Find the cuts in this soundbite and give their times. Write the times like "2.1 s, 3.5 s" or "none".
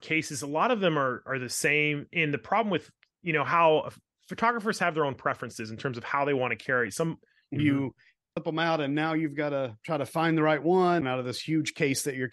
7.6 s